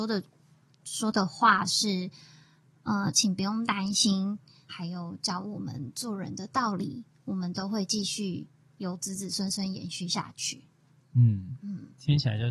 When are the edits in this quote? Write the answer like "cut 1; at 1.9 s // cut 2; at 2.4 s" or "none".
cut 1; at 4.7 s